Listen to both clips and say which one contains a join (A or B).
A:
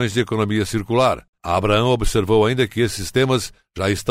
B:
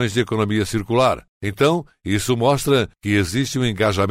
A